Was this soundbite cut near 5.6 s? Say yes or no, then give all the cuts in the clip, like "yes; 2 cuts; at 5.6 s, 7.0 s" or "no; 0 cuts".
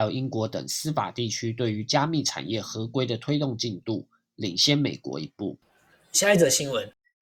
no; 0 cuts